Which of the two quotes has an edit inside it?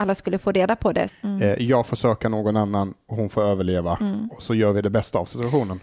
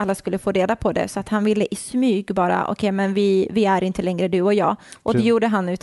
first; 1 cut; at 1.1 s

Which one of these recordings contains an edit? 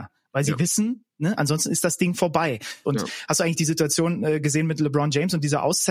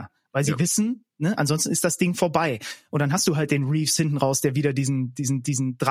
first; 1 cut; at 2.8 s

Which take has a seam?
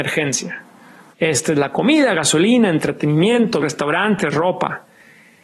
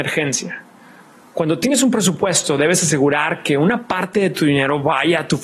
first; 2 cuts; at 1.1 s, 3.6 s

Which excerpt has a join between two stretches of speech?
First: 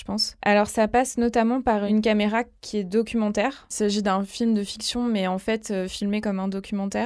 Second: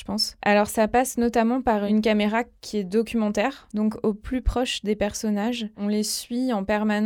second; 1 cut; at 3.7 s

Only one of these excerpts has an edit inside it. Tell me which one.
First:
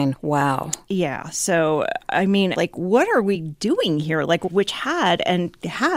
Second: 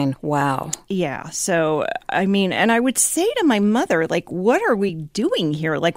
first; 2 cuts; at 2.5 s, 4.5 s

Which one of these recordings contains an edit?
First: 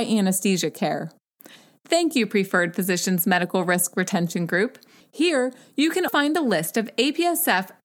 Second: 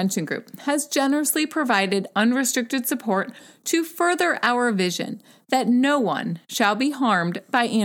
first; 2 cuts; at 5.0 s, 6.1 s

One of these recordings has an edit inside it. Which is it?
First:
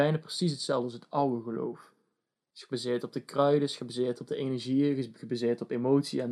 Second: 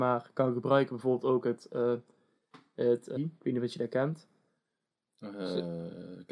second; 1 cut; at 3.2 s

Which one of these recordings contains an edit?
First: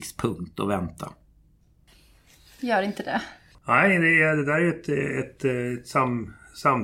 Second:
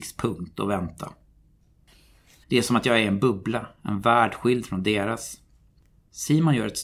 second; 1 cut; at 2.4 s

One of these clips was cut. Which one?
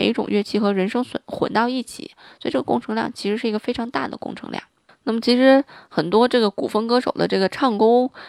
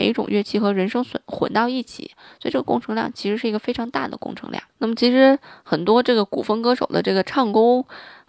second; 1 cut; at 4.7 s

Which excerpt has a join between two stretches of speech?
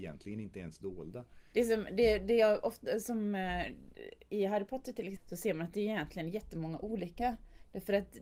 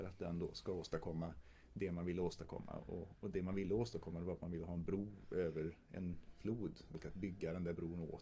first; 1 cut; at 1.5 s

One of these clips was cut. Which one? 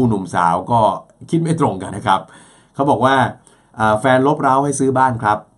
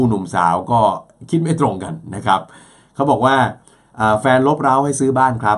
first; 1 cut; at 1.9 s

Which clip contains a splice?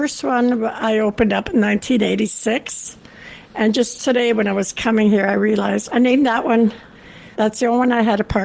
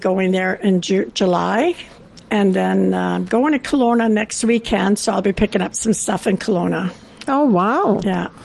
first; 2 cuts; at 5.9 s, 7.3 s

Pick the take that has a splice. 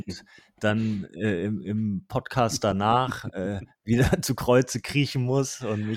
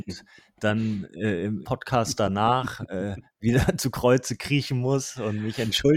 second; 1 cut; at 1.6 s

